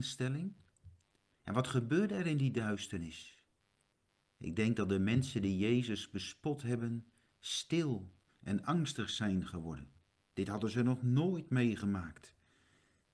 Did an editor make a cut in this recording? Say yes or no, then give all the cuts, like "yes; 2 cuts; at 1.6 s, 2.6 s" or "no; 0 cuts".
no; 0 cuts